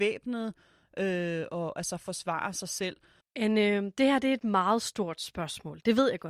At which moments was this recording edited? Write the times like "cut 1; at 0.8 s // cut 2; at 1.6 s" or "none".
cut 1; at 3.2 s